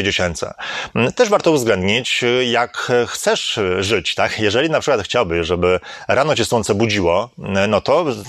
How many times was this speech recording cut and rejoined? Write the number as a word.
zero